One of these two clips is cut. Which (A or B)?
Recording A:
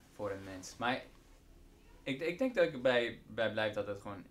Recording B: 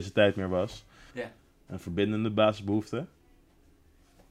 B